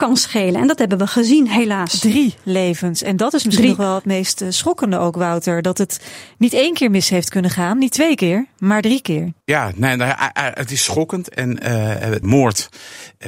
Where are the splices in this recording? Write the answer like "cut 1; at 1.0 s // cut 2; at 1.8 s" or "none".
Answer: cut 1; at 9.4 s // cut 2; at 12.2 s